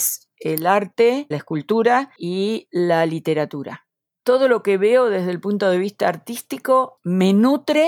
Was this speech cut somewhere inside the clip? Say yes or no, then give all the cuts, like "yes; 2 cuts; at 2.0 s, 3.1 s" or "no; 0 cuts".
yes; 1 cut; at 1.3 s